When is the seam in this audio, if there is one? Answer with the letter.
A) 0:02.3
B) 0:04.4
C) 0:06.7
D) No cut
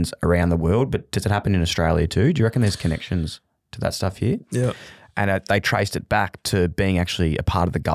B